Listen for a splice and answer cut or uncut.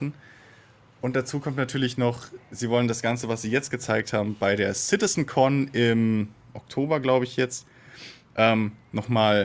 uncut